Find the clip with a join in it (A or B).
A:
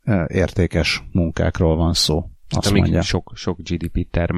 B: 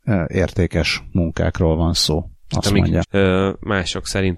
B